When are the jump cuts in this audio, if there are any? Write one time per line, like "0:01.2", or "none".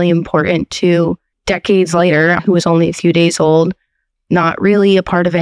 0:01.3
0:02.4